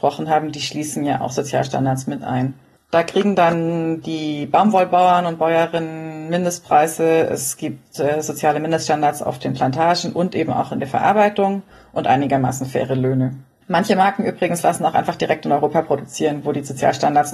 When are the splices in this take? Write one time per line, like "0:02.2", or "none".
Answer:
none